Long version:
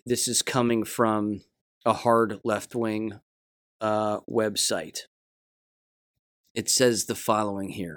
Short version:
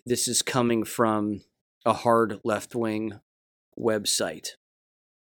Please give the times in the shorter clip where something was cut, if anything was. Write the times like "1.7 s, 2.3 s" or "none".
3.7 s